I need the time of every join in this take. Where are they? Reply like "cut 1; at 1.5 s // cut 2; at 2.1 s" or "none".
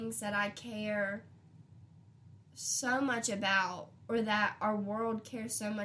none